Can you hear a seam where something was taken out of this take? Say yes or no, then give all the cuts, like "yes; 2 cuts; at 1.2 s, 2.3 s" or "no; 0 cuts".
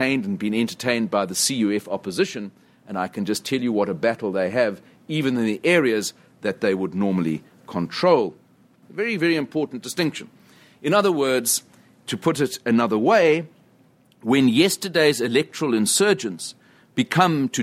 yes; 1 cut; at 8.8 s